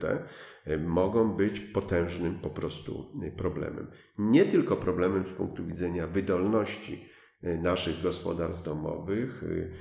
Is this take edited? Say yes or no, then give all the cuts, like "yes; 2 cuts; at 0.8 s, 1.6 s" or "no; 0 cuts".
no; 0 cuts